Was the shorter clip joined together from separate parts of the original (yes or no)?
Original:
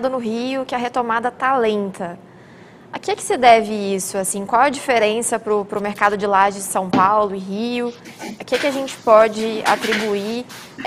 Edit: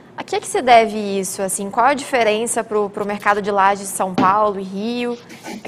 no